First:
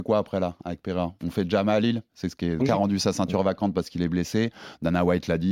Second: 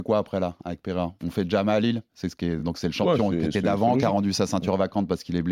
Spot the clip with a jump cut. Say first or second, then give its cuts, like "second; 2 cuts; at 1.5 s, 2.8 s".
first; 1 cut; at 2.6 s